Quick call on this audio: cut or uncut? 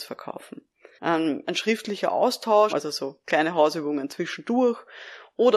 cut